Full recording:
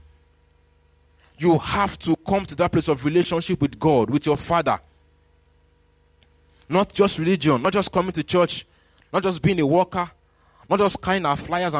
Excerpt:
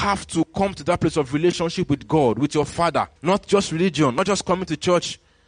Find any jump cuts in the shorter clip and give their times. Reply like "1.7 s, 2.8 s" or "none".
3.2 s

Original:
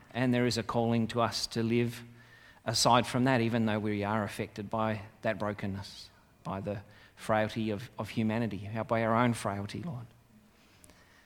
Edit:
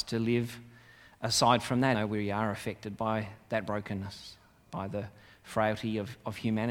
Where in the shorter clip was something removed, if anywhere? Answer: 1.9 s

